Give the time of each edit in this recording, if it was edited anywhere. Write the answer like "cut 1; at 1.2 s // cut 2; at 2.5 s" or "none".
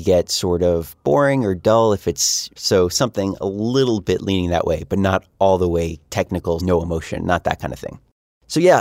cut 1; at 2.6 s // cut 2; at 6.6 s

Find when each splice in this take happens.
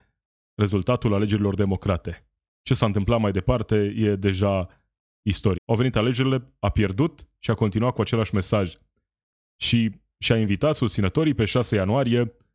cut 1; at 5.6 s

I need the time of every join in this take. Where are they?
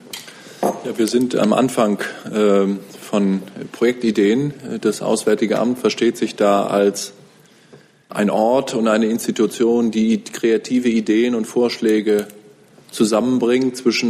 cut 1; at 8.1 s

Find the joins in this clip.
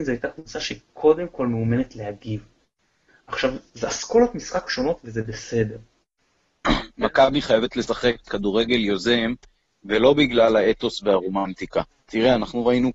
cut 1; at 6.6 s // cut 2; at 8.2 s

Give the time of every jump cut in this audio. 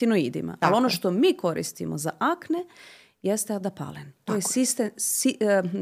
none

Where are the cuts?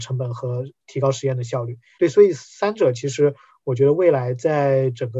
cut 1; at 2.0 s

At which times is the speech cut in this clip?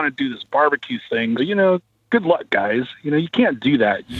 cut 1; at 1.4 s

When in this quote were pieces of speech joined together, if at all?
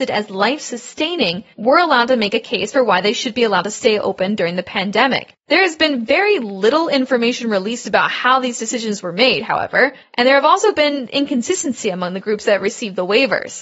none

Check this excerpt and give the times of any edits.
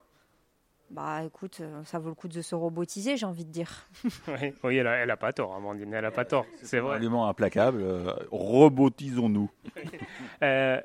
none

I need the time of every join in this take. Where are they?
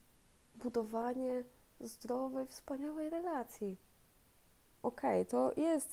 cut 1; at 4.8 s

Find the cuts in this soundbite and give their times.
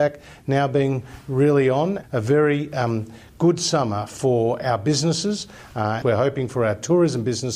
cut 1; at 2.0 s // cut 2; at 6.0 s

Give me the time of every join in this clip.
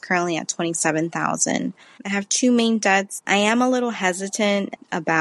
cut 1; at 2.0 s // cut 2; at 3.2 s

